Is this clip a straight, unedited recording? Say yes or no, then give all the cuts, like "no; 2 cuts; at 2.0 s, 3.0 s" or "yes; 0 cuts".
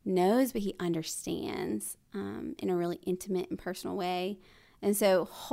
yes; 0 cuts